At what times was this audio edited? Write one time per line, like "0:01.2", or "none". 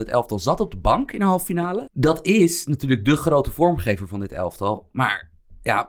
0:01.9